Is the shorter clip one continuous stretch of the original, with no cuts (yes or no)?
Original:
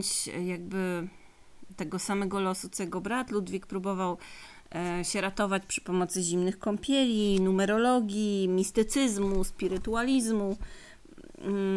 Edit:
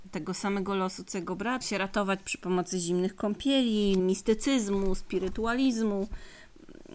no